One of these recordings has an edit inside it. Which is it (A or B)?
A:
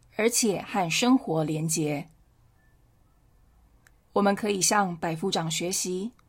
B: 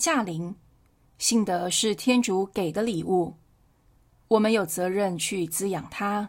B